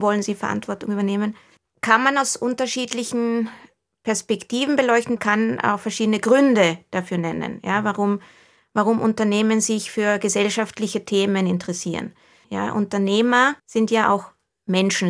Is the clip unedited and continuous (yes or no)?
no